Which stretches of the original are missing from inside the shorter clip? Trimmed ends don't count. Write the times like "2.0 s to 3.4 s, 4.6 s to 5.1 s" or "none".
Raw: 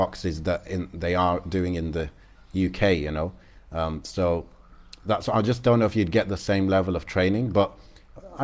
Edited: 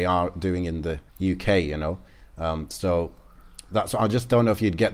2.2 s to 2.4 s